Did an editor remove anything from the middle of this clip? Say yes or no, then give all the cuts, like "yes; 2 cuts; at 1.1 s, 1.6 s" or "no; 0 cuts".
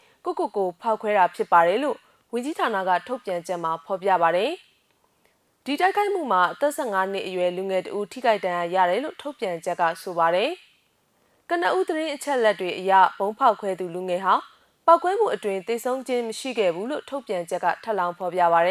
no; 0 cuts